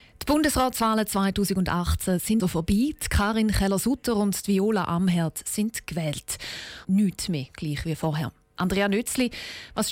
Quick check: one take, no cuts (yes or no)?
no